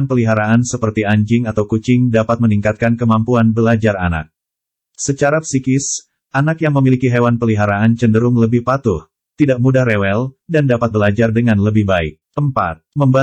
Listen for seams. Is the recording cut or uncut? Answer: uncut